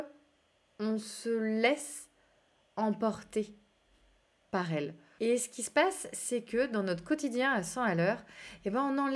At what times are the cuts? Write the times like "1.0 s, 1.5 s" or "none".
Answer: 5.2 s